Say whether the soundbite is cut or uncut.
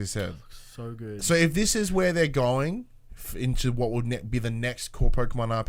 uncut